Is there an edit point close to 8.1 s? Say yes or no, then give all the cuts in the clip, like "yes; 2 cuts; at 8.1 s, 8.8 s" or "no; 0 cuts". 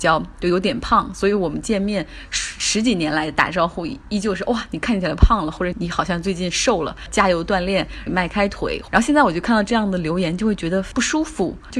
yes; 2 cuts; at 5.7 s, 8.1 s